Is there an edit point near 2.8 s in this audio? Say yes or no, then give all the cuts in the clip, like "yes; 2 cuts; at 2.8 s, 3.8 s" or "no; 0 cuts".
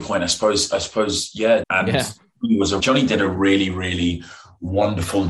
yes; 2 cuts; at 1.6 s, 2.8 s